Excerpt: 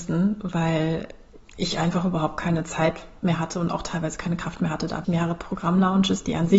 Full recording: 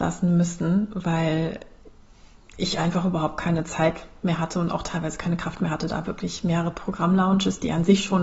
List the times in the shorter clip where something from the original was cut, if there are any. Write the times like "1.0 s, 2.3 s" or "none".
1.5 s, 5.0 s

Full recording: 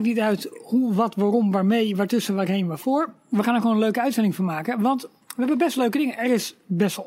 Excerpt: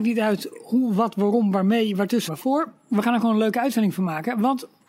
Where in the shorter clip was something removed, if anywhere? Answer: 2.3 s

